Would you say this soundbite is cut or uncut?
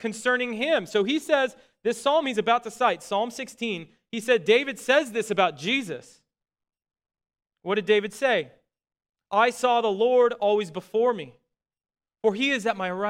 uncut